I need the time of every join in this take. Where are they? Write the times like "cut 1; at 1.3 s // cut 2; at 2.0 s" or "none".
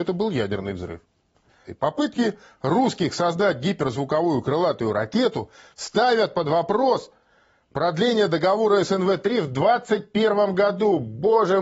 cut 1; at 1.7 s